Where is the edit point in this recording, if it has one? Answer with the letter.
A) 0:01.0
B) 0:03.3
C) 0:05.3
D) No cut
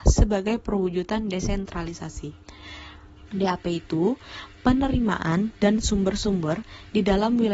B